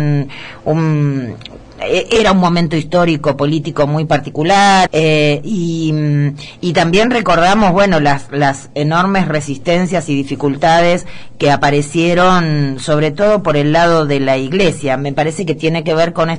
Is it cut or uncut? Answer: cut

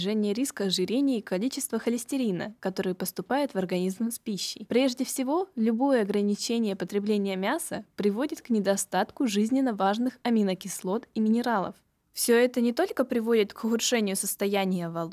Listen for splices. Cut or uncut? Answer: cut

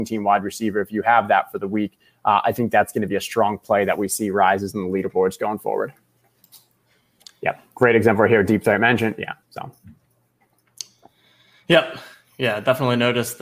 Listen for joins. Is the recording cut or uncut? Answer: cut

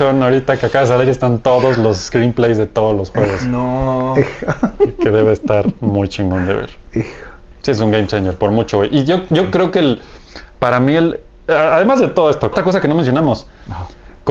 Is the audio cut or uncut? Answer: cut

